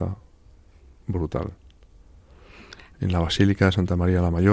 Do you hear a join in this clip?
yes; 1 cut; at 2.9 s

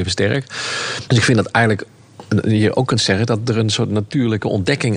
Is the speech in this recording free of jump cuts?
no; 1 cut; at 1.1 s

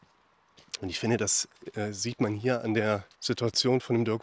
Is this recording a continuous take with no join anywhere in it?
no; 1 cut; at 3.1 s

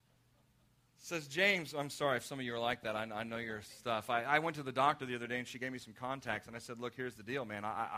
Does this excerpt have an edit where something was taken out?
no; 0 cuts

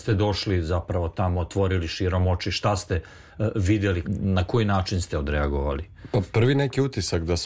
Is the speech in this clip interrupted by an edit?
yes; 1 cut; at 4.0 s

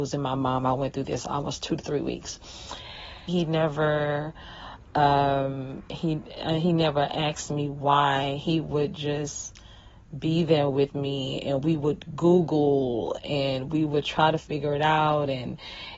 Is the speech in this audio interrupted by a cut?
yes; 1 cut; at 3.3 s

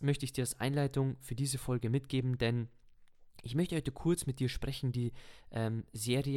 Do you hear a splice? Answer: no; 0 cuts

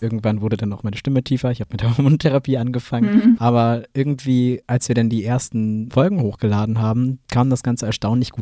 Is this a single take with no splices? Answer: no; 1 cut; at 3.4 s

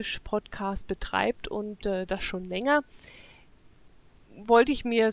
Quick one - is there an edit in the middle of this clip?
no; 0 cuts

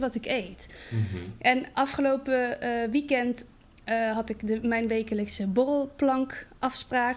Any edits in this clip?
no; 0 cuts

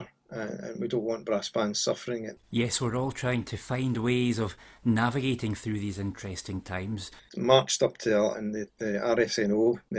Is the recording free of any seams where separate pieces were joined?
no; 3 cuts; at 2.4 s, 7.2 s, 8.3 s

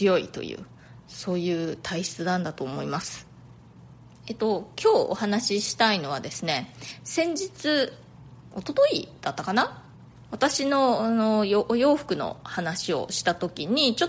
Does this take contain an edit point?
no; 0 cuts

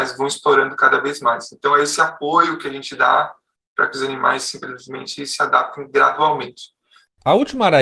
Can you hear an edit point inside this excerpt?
no; 0 cuts

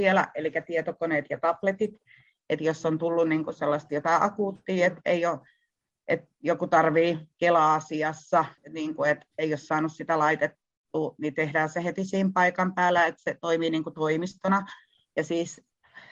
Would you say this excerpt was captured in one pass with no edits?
no; 1 cut; at 8.6 s

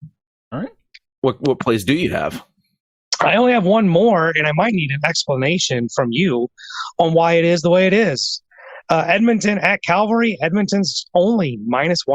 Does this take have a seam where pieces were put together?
no; 0 cuts

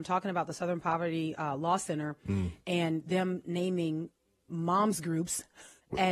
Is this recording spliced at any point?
no; 0 cuts

